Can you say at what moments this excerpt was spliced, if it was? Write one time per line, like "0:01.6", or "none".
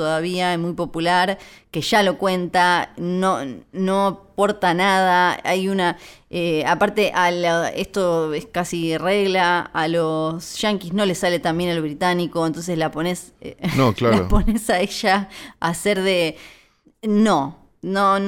none